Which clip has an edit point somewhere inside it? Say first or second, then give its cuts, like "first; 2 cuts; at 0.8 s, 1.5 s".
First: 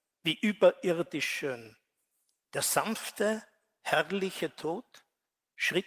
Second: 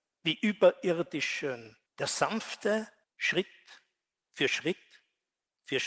second; 2 cuts; at 1.9 s, 3.0 s